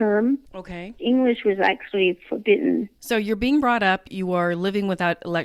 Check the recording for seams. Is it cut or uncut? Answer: cut